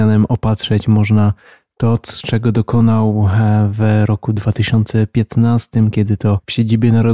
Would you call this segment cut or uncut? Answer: uncut